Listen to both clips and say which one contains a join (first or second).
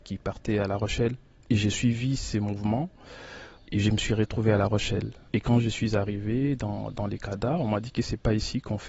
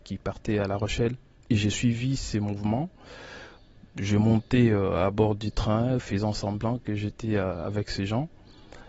first